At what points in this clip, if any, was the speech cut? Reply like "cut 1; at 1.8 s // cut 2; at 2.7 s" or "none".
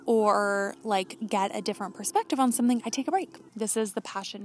cut 1; at 3.5 s

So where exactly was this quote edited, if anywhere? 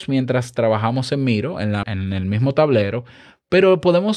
cut 1; at 1.8 s

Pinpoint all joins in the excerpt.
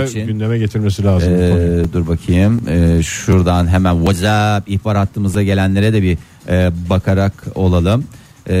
none

